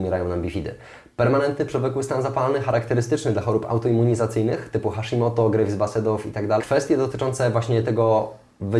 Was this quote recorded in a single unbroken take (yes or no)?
no